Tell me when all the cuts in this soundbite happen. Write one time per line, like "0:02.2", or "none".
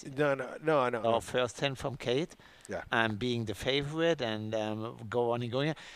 0:01.0